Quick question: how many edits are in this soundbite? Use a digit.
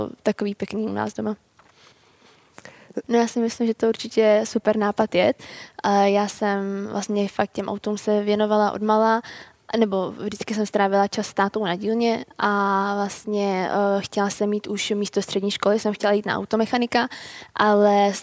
1